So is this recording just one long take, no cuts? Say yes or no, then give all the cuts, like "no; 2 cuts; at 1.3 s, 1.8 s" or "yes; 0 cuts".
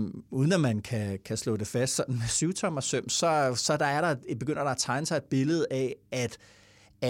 yes; 0 cuts